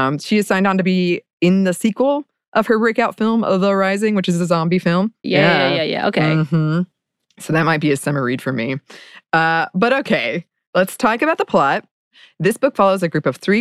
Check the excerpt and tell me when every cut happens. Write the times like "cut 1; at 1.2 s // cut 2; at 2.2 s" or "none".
cut 1; at 5.2 s